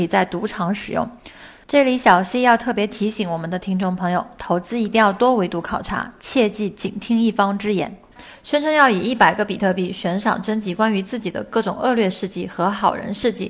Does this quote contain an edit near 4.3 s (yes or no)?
no